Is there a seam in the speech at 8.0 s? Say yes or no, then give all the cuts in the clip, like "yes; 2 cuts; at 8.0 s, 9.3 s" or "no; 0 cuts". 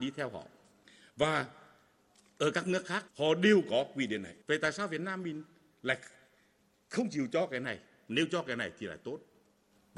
no; 2 cuts; at 3.1 s, 4.4 s